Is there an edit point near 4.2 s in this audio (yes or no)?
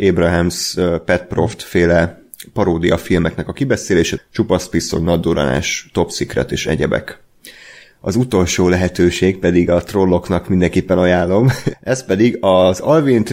yes